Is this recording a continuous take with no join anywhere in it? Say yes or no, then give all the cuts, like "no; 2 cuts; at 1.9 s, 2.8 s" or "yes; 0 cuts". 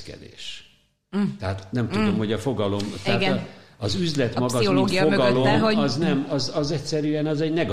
yes; 0 cuts